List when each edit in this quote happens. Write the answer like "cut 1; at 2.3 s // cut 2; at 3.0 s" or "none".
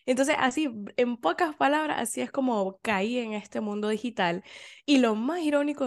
none